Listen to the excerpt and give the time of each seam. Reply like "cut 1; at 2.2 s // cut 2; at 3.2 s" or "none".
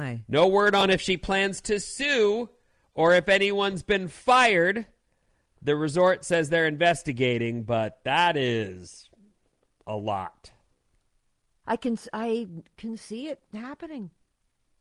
cut 1; at 11.6 s